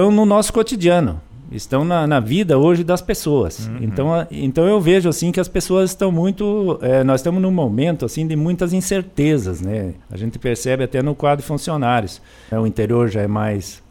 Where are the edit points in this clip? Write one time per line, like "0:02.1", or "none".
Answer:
0:10.0
0:12.5